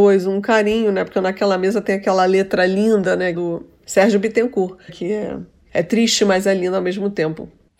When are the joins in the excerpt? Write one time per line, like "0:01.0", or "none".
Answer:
0:03.3
0:04.9